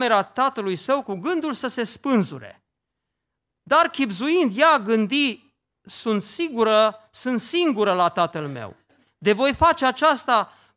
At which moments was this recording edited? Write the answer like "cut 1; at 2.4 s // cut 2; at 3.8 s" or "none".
none